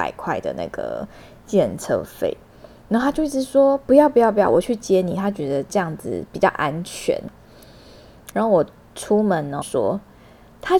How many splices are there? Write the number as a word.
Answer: two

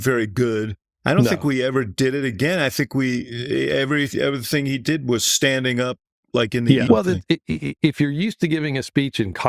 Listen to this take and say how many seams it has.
one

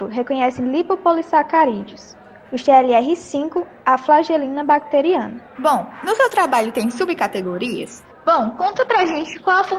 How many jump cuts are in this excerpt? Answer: two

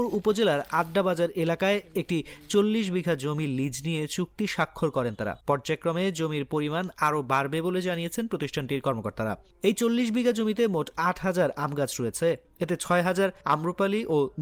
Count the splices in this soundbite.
one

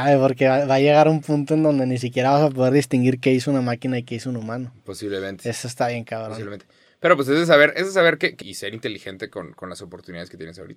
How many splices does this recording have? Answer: one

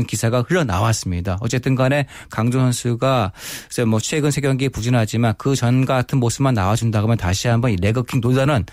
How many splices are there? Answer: zero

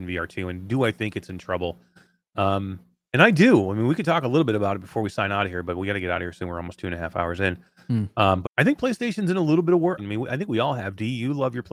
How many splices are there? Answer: two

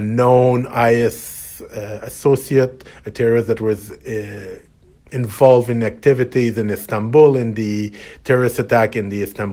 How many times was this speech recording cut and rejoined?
zero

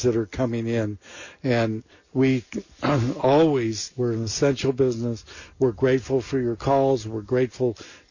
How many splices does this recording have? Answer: one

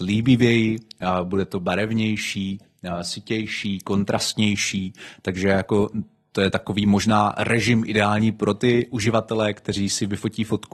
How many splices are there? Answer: zero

